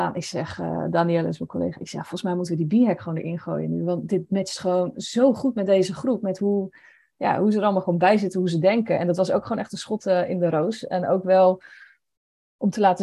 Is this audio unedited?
yes; 0 cuts

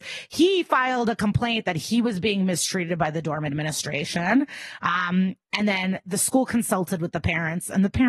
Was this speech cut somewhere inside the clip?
no; 0 cuts

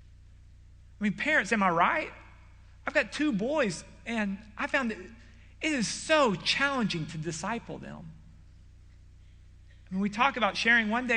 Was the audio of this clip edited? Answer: no; 0 cuts

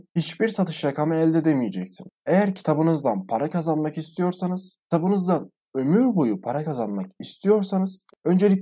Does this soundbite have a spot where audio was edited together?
yes; 1 cut; at 2.1 s

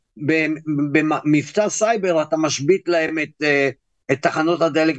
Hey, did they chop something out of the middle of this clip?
no; 0 cuts

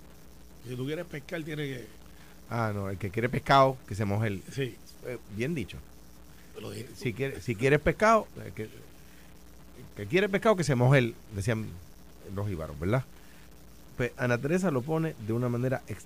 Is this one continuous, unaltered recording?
yes; 0 cuts

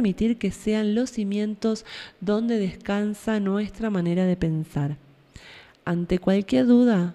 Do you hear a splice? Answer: no; 0 cuts

